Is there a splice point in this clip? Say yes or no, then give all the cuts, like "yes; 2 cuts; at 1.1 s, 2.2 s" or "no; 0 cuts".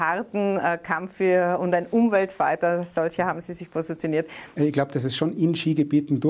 yes; 1 cut; at 4.6 s